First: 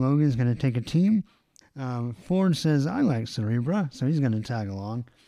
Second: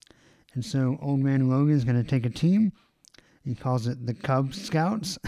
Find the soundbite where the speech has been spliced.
first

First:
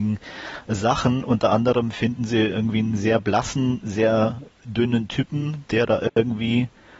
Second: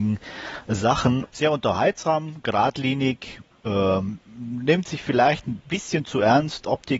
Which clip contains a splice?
second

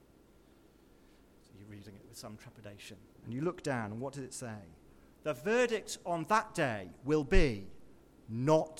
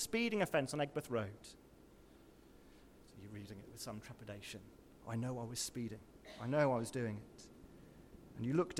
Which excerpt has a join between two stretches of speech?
first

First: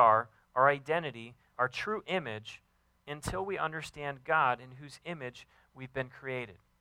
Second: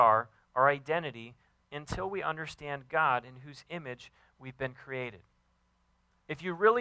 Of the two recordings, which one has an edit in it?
second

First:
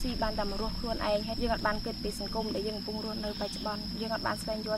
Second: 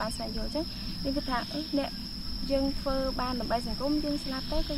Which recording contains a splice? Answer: first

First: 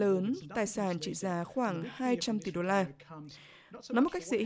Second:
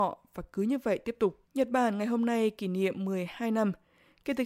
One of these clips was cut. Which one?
second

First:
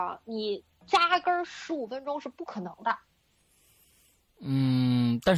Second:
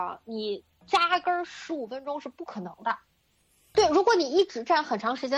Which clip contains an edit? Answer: second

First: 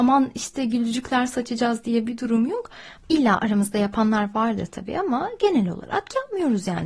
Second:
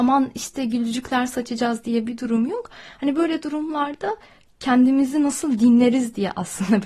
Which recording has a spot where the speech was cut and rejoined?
first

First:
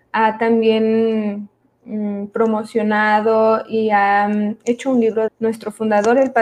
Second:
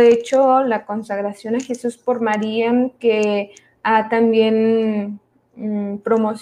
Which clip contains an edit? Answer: first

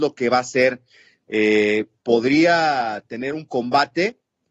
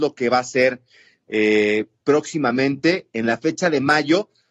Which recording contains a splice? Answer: second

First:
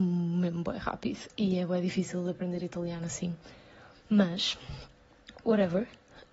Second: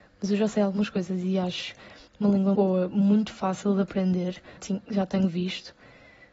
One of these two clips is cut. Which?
second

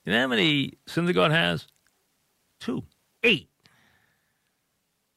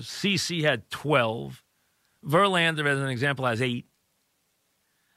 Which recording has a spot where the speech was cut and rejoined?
first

